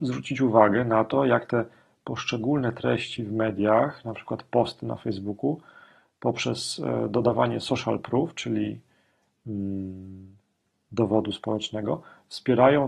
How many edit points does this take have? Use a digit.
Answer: 0